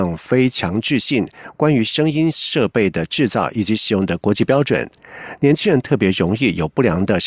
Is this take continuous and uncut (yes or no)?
yes